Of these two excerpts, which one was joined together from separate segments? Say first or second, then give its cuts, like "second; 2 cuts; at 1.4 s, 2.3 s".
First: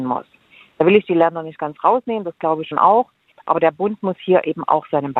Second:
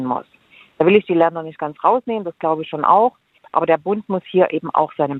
first; 1 cut; at 2.7 s